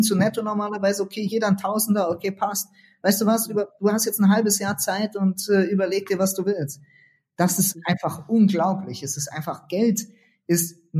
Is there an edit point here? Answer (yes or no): no